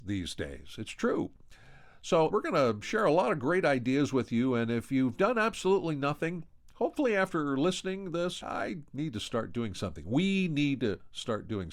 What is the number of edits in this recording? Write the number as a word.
two